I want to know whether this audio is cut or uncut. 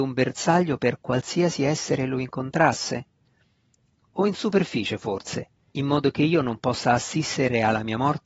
cut